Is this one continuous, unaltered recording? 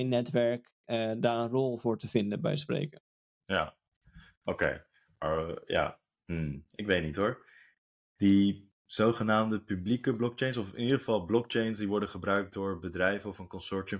yes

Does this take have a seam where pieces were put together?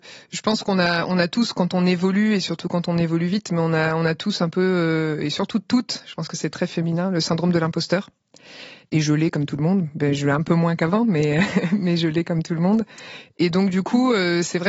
no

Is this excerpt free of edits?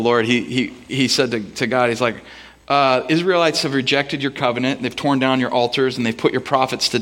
yes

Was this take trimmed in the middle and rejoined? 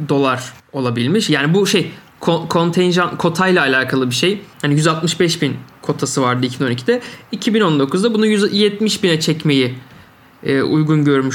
yes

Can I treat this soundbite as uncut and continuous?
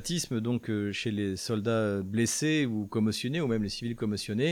yes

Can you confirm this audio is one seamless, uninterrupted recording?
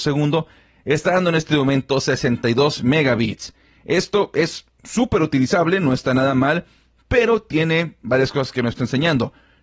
yes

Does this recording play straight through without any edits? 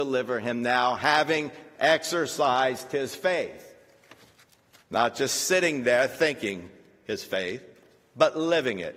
yes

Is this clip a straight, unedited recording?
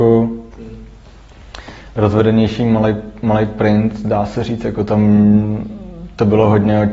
yes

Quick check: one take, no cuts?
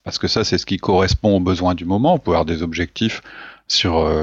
yes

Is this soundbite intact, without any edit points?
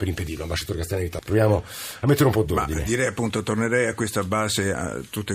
no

